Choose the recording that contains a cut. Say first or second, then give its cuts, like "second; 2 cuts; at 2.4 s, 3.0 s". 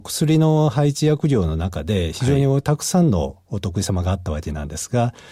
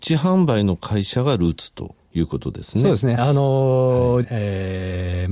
second; 2 cuts; at 3.2 s, 4.2 s